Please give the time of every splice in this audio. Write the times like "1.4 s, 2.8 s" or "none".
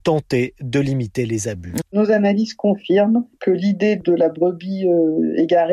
1.8 s

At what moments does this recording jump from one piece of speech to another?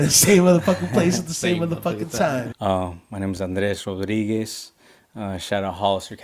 2.5 s

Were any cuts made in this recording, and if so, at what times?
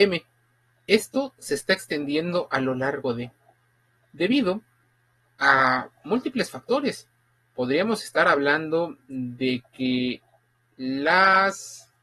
none

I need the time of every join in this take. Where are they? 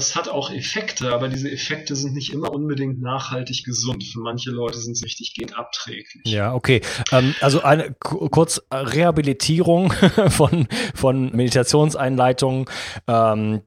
11.3 s

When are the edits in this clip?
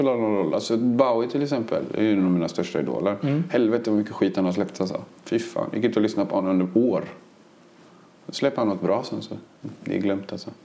none

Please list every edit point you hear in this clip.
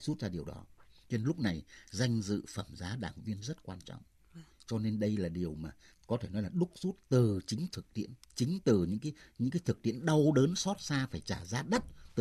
4.5 s, 8.2 s

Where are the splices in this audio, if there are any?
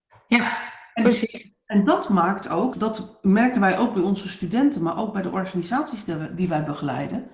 2.7 s

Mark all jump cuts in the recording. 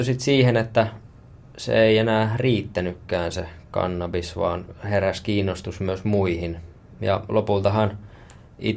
7.0 s

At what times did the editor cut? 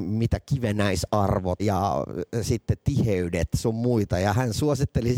1.6 s

